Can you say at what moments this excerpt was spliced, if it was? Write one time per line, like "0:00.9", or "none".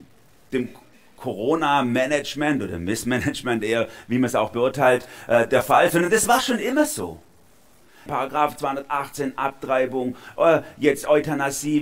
0:08.1